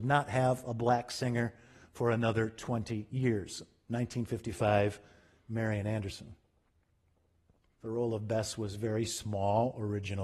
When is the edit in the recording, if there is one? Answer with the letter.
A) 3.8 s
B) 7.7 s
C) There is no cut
B